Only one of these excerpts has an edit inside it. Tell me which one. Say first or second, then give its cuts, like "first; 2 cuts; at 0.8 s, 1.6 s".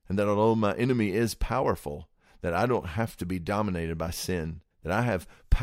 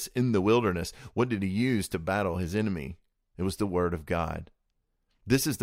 first; 1 cut; at 4.7 s